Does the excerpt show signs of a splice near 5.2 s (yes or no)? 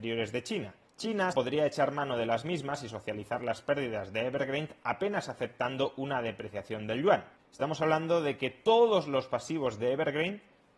no